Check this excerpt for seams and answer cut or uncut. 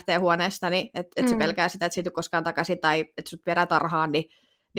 uncut